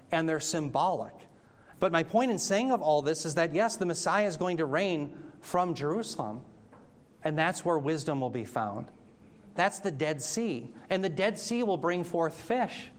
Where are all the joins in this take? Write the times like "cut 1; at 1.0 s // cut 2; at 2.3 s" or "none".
cut 1; at 1.7 s // cut 2; at 9.6 s